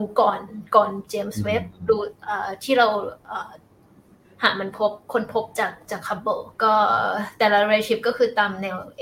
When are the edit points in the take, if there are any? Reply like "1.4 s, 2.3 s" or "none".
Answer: 6.5 s